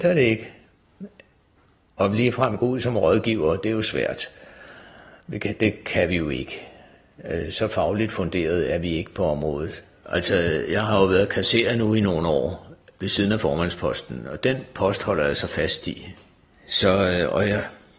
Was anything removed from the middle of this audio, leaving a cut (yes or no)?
yes